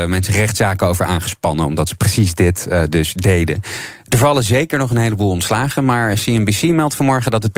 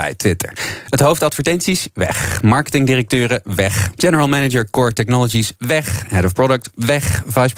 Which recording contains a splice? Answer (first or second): second